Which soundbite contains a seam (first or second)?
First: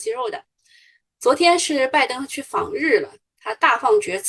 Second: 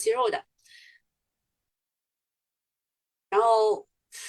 first